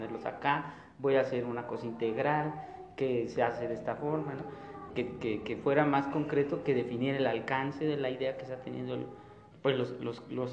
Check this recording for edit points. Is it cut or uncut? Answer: cut